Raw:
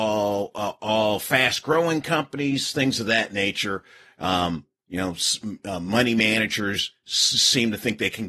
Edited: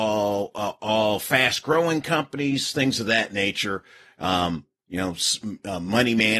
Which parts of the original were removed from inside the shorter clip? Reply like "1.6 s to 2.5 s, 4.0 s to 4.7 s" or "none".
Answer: none